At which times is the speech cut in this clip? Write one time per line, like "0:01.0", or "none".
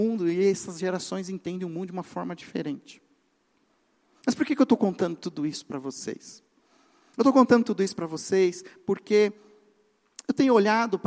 none